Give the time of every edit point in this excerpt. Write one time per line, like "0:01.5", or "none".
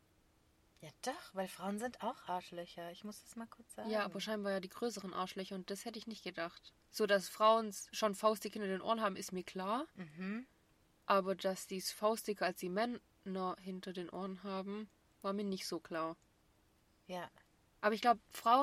0:06.8